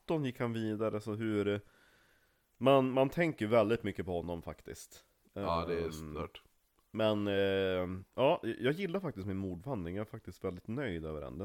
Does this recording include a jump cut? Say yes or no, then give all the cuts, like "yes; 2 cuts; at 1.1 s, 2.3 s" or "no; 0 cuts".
no; 0 cuts